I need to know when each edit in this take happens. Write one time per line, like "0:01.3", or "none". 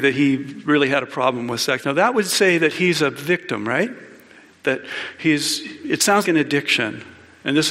0:01.8
0:06.2